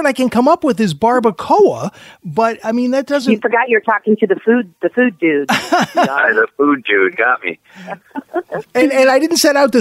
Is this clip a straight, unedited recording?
yes; 0 cuts

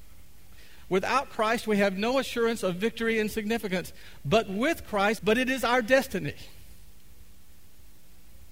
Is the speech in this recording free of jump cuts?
no; 1 cut; at 5.2 s

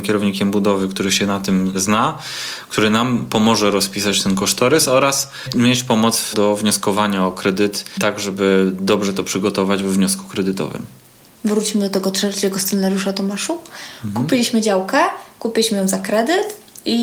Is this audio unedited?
yes; 0 cuts

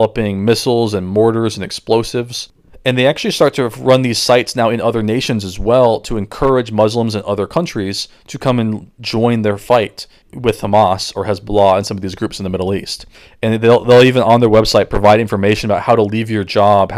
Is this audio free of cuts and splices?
yes; 0 cuts

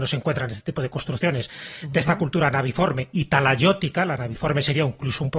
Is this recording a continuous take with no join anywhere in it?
yes; 0 cuts

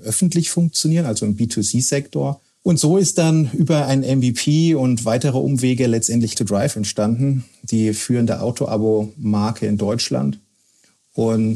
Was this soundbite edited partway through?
yes; 1 cut; at 6.3 s

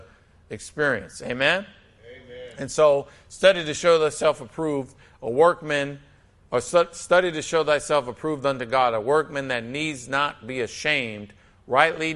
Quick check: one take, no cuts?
yes; 0 cuts

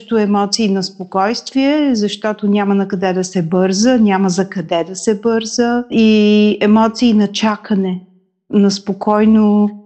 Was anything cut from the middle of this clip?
no; 0 cuts

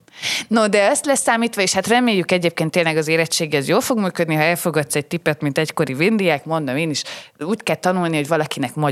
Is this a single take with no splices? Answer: yes; 0 cuts

